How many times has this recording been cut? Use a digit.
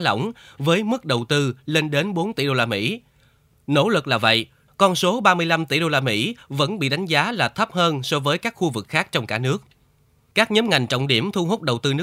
2